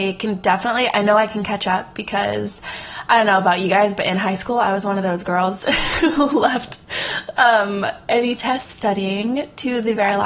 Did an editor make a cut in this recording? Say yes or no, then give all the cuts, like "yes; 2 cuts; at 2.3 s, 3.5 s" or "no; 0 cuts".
no; 0 cuts